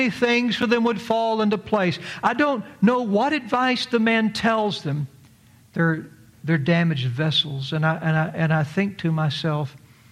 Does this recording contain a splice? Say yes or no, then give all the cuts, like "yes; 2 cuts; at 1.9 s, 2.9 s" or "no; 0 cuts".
yes; 1 cut; at 5.6 s